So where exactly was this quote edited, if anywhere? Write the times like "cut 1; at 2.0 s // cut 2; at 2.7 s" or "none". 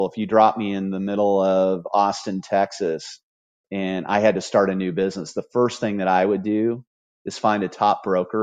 cut 1; at 3.6 s

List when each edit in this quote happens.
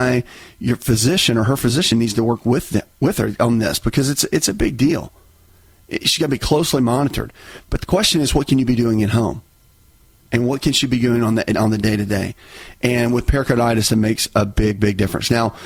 none

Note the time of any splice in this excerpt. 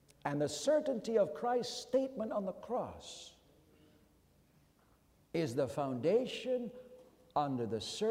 none

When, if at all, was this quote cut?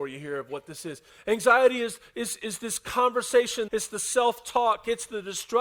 cut 1; at 1.1 s // cut 2; at 3.7 s

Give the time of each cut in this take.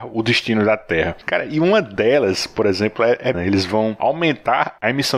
cut 1; at 3.3 s

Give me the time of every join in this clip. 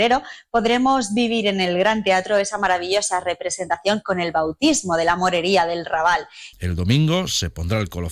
cut 1; at 6.5 s

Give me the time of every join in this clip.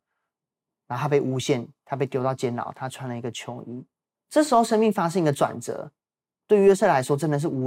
cut 1; at 4.1 s

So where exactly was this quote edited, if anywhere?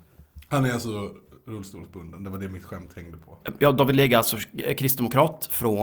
cut 1; at 3.4 s

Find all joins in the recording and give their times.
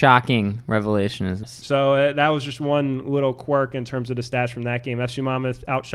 cut 1; at 1.4 s

